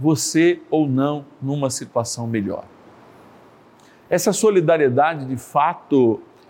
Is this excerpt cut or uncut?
uncut